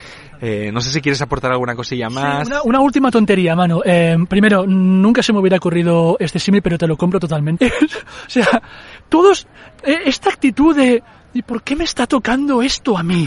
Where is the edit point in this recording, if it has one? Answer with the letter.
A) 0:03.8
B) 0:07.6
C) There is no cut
B